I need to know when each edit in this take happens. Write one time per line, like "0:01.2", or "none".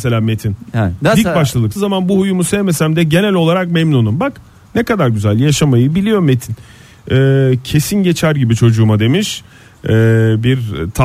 0:01.8